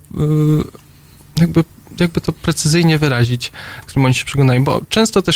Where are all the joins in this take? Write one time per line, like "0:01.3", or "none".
0:03.8